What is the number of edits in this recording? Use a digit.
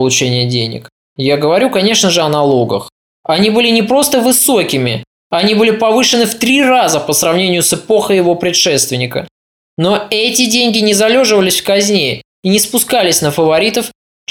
0